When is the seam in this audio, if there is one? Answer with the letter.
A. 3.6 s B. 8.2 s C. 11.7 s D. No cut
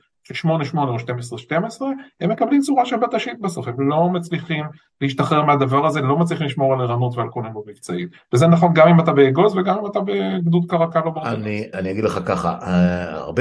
C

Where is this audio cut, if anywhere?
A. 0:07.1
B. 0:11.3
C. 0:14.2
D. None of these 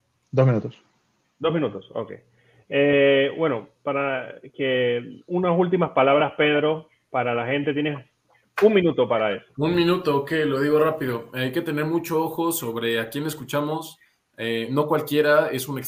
D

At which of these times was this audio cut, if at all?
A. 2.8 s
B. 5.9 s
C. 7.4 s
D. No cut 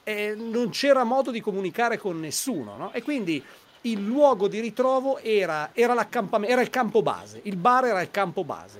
D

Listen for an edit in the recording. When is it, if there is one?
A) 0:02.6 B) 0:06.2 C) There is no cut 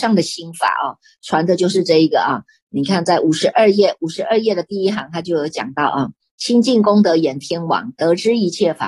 C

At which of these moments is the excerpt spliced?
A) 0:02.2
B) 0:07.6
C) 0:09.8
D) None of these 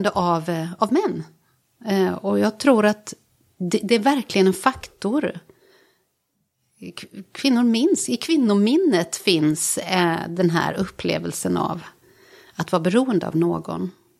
D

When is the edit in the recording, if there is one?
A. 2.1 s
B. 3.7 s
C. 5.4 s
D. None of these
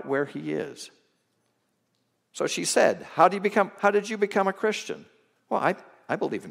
C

